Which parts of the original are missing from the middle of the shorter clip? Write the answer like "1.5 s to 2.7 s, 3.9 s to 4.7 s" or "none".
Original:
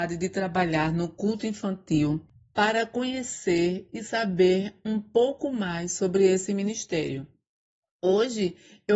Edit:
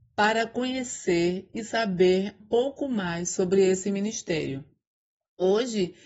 4.8 s to 5.0 s